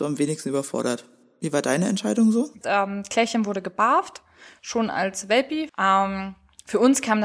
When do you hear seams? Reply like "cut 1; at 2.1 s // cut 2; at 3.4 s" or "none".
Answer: cut 1; at 2.6 s // cut 2; at 5.7 s